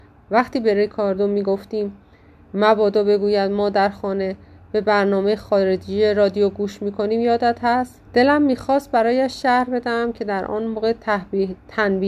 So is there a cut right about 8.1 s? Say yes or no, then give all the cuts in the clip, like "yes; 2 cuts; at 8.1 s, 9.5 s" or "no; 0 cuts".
yes; 1 cut; at 8.1 s